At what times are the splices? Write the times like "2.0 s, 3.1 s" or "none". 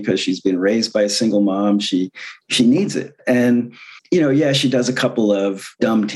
2.4 s, 4.0 s